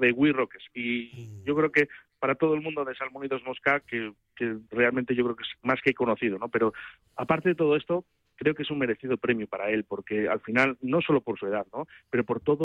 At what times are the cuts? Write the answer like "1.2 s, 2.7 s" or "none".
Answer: 3.8 s